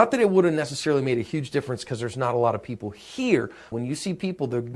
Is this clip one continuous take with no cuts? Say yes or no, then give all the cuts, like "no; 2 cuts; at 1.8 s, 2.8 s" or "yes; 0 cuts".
no; 1 cut; at 3.7 s